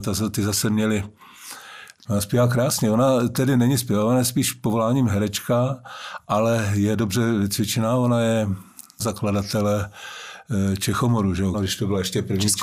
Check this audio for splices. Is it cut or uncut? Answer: cut